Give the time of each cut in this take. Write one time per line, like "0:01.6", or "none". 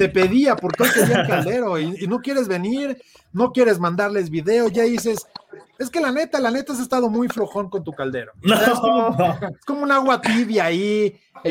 none